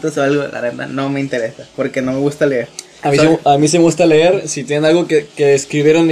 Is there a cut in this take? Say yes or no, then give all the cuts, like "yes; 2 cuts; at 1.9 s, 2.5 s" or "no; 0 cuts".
no; 0 cuts